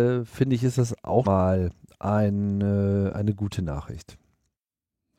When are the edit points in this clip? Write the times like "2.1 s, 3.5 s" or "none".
1.2 s